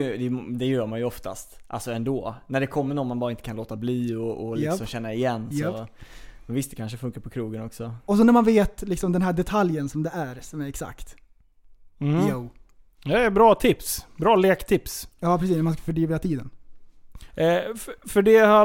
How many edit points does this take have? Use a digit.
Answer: 1